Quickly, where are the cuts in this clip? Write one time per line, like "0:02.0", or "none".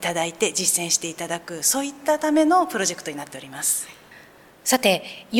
none